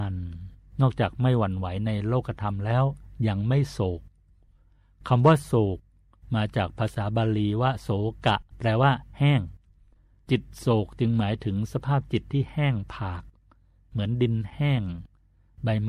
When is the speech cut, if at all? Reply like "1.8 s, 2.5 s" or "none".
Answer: 8.5 s